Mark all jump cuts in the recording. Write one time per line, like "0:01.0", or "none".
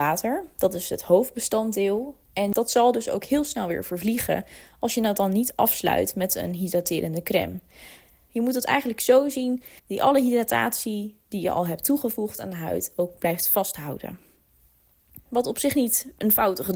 0:09.8
0:15.3